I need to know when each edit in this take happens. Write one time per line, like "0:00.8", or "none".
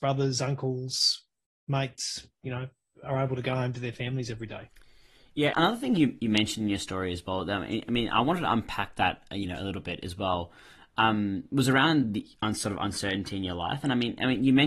none